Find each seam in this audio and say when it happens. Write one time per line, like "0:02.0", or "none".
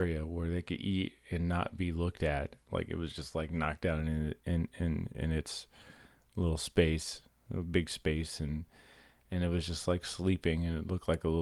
0:02.6